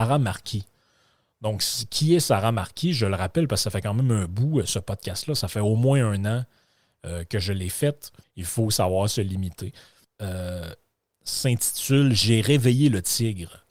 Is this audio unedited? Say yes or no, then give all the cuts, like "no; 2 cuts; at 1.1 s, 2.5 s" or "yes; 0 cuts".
no; 2 cuts; at 8.2 s, 10.0 s